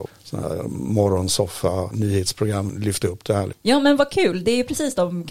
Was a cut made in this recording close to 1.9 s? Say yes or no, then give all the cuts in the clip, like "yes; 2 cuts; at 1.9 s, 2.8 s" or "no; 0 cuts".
yes; 2 cuts; at 1.9 s, 3.5 s